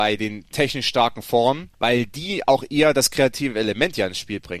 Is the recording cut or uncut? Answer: cut